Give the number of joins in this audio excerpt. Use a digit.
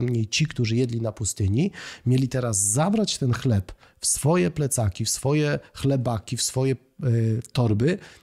0